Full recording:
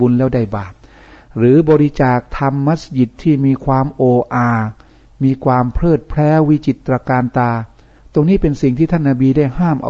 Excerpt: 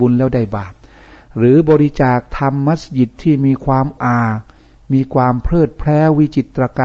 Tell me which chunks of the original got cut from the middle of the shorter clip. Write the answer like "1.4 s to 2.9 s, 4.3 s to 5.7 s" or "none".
4.0 s to 4.3 s